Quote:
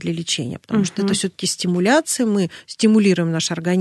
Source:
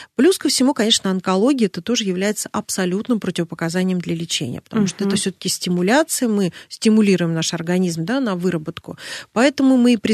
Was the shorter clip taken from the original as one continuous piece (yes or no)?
yes